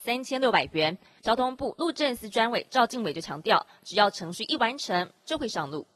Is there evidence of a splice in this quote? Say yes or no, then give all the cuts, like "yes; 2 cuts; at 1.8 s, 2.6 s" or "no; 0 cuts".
yes; 1 cut; at 1.2 s